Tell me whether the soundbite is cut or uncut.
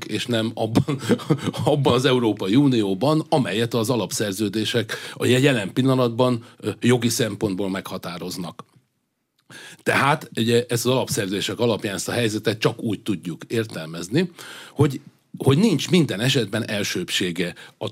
uncut